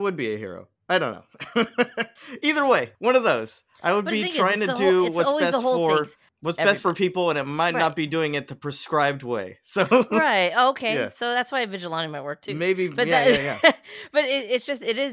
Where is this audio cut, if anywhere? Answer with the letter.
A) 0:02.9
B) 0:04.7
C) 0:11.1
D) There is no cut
A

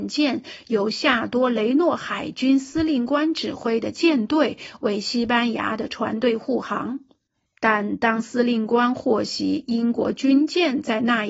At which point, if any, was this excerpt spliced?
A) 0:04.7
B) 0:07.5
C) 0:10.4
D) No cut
B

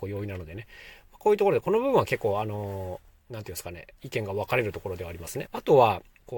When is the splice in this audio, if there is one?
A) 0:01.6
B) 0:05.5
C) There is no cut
B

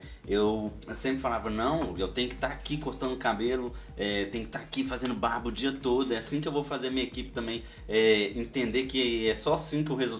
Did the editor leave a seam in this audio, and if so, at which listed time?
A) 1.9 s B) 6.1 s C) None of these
C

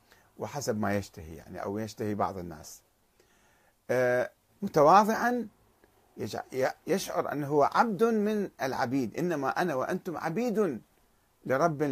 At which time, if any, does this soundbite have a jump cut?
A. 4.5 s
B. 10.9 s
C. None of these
A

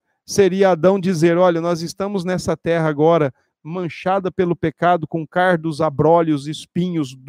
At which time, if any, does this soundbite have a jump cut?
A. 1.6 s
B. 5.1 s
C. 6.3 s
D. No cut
D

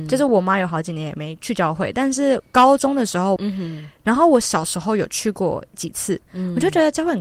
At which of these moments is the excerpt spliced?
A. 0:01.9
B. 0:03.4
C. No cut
B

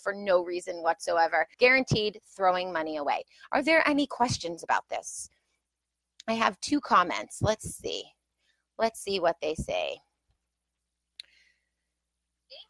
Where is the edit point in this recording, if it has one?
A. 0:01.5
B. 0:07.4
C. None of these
A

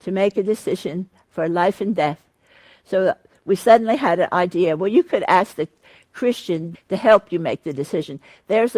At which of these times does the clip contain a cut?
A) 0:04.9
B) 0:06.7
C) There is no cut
B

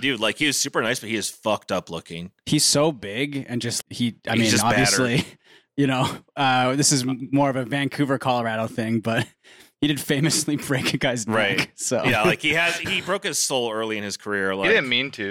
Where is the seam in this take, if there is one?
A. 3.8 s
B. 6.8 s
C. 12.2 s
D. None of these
A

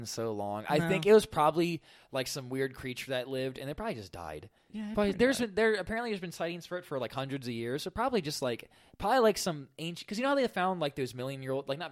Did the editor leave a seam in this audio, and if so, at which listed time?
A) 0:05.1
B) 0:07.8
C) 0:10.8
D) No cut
A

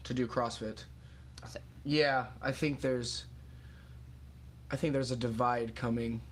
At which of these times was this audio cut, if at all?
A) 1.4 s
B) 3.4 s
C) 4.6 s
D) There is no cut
A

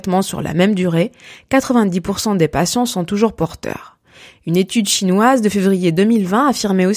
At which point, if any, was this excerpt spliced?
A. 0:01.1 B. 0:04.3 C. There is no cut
C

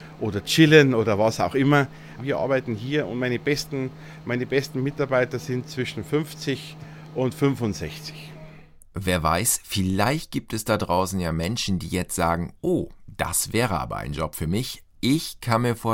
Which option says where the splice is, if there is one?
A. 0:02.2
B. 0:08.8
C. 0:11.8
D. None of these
A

